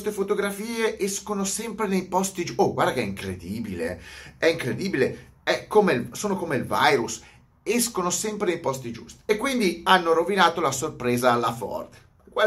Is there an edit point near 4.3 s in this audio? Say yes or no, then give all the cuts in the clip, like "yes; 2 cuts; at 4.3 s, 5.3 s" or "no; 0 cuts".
no; 0 cuts